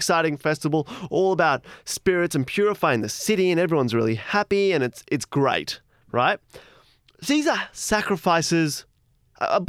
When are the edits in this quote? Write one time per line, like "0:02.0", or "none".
0:07.0

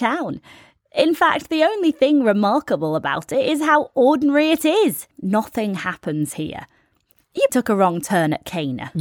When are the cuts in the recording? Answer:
0:05.1
0:07.5

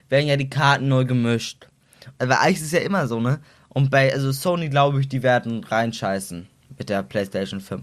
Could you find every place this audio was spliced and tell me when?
0:02.2

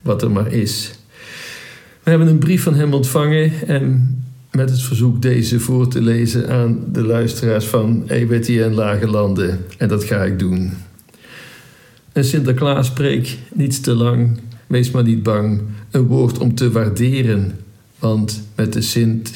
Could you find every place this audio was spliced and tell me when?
0:14.6

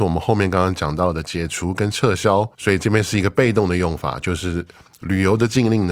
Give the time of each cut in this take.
0:02.5

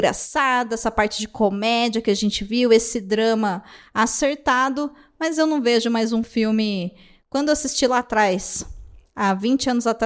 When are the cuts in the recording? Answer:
none

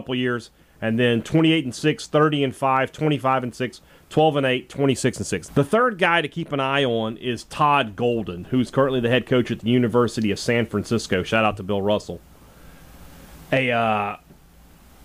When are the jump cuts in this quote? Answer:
0:05.5

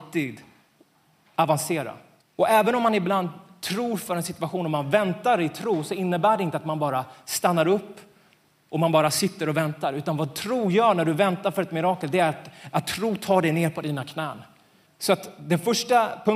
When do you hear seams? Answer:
0:02.2
0:14.9

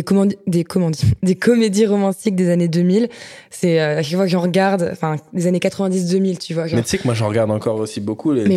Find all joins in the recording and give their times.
none

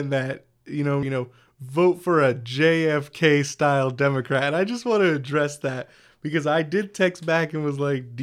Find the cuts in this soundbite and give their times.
0:01.0

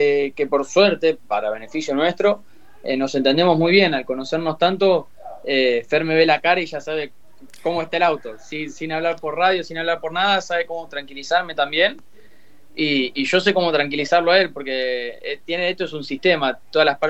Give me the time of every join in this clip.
none

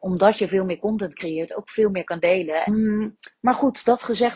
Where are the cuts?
0:02.7

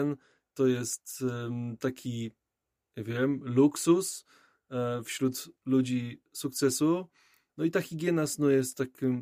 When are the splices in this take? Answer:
0:07.5

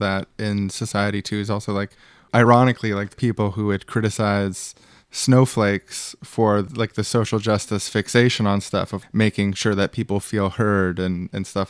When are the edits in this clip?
0:03.1
0:09.0

